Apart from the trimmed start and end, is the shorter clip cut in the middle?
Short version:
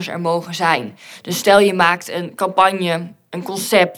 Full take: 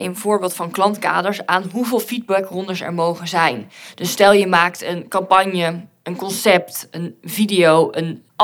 no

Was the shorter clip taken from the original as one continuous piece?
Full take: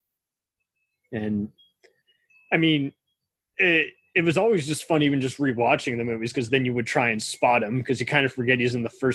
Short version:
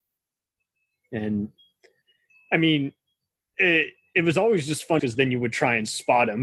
no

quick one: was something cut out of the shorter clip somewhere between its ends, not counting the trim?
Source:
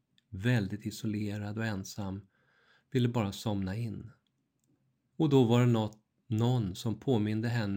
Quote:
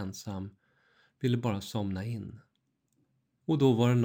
no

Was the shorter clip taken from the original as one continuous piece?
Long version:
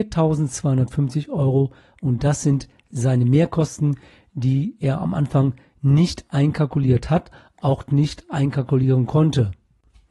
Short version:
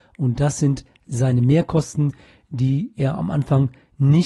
yes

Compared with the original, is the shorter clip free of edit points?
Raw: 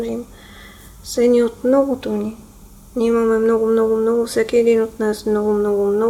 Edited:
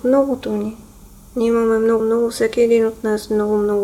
no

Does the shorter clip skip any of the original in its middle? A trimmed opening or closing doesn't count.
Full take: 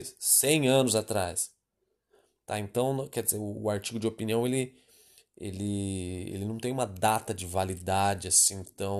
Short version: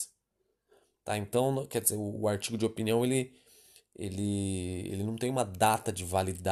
no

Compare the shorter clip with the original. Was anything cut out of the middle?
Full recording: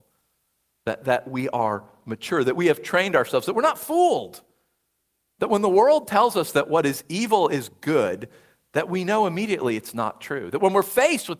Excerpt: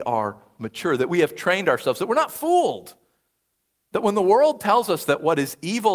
no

